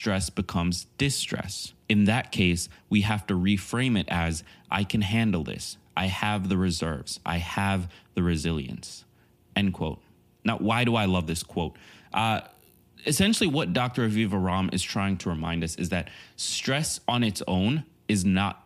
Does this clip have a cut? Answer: no; 0 cuts

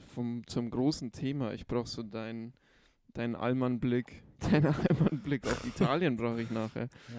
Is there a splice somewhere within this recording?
yes; 1 cut; at 4.4 s

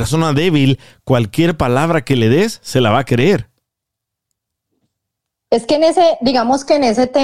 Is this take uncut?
yes; 0 cuts

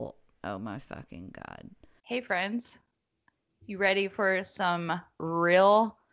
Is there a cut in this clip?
yes; 1 cut; at 2.0 s

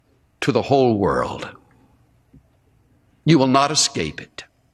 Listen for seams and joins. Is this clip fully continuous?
yes; 0 cuts

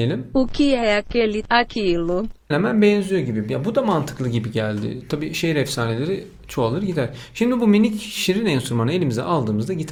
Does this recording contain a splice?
yes; 1 cut; at 2.5 s

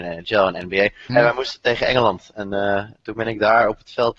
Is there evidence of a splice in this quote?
yes; 1 cut; at 1.1 s

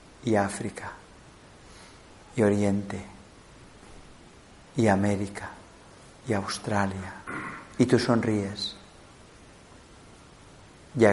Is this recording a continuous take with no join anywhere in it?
no; 1 cut; at 7.8 s

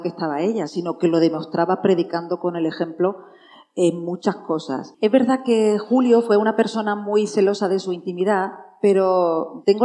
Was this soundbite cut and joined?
yes; 1 cut; at 4.9 s

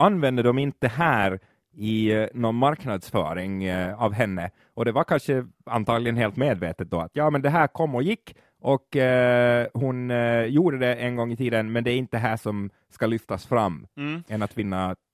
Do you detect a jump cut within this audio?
yes; 1 cut; at 14.2 s

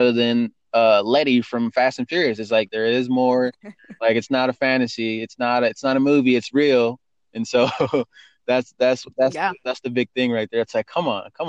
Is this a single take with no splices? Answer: no; 1 cut; at 2.7 s

